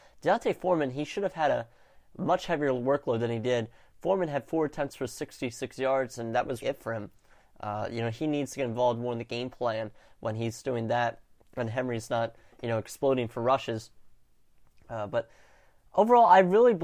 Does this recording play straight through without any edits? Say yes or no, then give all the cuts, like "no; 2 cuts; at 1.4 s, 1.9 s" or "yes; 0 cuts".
no; 1 cut; at 6.6 s